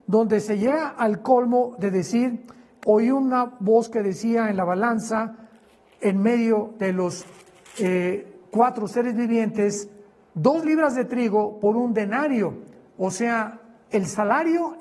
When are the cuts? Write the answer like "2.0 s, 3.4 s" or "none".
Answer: 2.8 s